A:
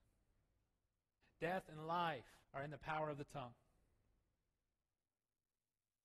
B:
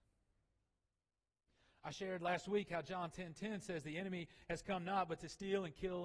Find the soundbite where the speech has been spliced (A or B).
A